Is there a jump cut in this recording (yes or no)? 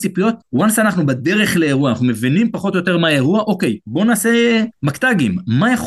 no